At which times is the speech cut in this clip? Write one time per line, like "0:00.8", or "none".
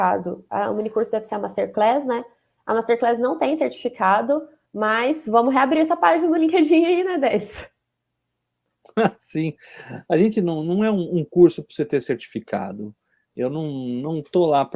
none